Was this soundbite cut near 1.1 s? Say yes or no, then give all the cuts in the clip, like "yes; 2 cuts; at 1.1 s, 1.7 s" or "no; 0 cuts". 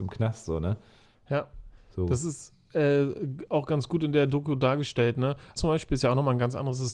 yes; 2 cuts; at 1.1 s, 5.6 s